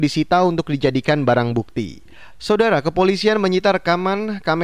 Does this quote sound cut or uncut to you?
cut